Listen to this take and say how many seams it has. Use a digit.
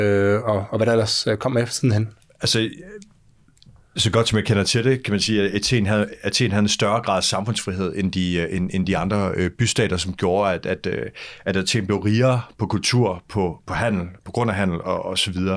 0